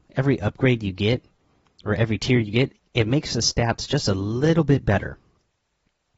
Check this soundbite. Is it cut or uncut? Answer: uncut